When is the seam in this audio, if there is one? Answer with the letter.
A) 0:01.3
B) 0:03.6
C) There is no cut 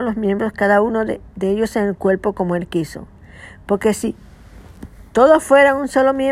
C